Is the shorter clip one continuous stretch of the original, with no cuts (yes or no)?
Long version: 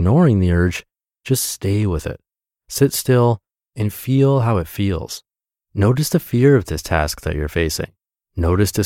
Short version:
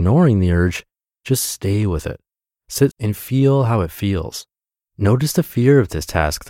no